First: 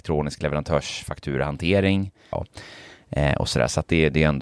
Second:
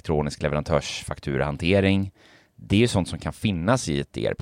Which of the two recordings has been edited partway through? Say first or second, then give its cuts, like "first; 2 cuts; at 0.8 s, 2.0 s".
first; 1 cut; at 2.3 s